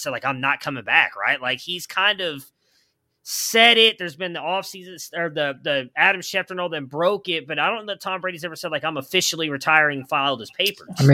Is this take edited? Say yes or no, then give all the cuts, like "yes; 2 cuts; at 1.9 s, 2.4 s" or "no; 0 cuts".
no; 0 cuts